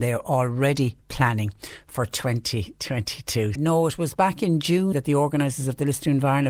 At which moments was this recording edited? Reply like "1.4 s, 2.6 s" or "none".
3.6 s, 4.9 s

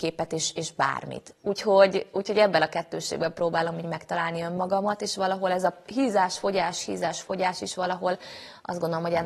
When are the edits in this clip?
none

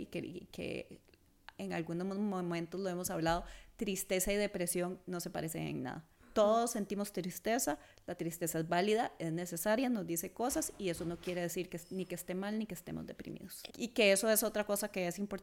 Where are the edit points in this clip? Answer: 13.7 s

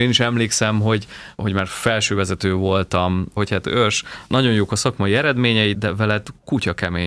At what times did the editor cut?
3.4 s, 5.7 s

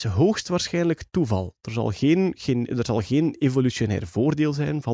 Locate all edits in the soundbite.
none

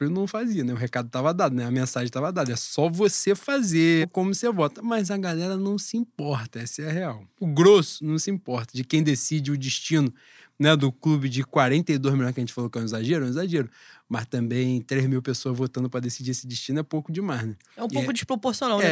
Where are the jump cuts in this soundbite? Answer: 4.0 s

